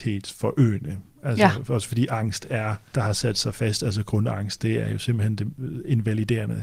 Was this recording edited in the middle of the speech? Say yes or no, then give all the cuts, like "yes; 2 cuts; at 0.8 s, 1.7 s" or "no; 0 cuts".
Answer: yes; 1 cut; at 2.9 s